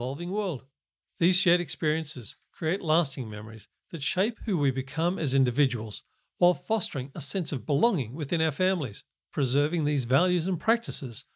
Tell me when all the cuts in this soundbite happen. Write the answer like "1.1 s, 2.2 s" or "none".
9.3 s